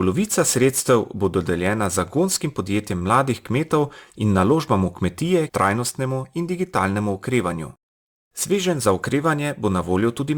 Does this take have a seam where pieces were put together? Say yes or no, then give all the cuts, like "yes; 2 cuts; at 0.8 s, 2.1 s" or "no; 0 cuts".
yes; 2 cuts; at 5.5 s, 8.2 s